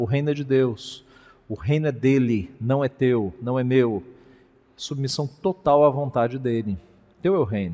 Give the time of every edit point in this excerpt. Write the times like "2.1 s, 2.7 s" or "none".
none